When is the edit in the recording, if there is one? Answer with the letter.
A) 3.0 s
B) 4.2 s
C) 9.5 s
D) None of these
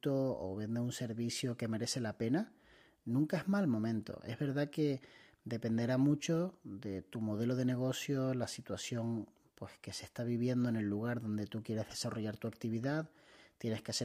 D